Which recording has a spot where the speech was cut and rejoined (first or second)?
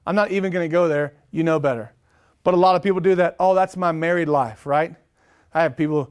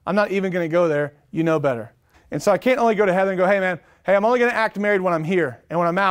second